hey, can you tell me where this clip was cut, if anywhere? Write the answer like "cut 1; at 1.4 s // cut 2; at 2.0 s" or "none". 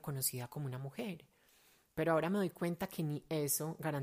none